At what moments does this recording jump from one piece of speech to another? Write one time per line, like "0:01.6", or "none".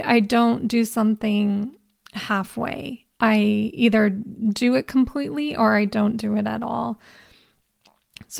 none